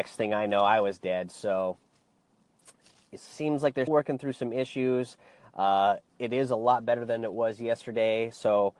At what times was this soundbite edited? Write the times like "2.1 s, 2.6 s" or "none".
3.9 s